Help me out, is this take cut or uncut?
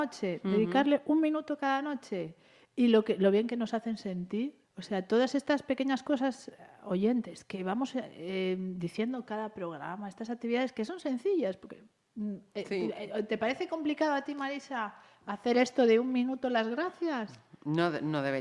uncut